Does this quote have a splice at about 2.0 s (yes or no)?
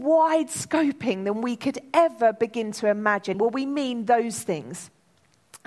no